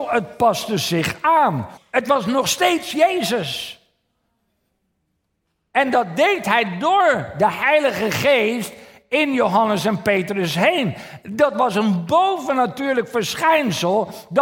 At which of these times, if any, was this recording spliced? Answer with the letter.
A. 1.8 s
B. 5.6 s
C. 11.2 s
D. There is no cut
A